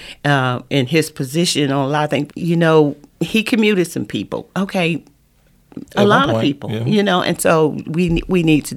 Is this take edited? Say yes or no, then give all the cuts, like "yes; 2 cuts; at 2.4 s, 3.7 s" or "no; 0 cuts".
yes; 2 cuts; at 2.3 s, 5.8 s